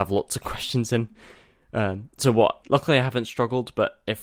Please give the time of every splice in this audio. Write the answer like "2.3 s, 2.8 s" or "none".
2.6 s